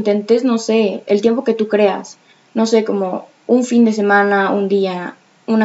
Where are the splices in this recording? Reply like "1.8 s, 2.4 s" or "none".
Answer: none